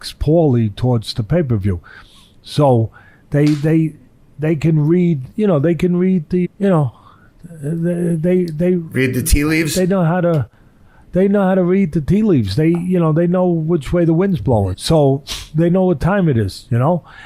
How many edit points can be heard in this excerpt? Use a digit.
2